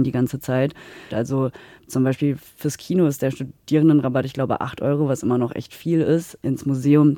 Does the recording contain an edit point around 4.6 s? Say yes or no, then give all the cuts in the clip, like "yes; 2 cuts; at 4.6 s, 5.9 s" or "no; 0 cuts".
no; 1 cut; at 1.1 s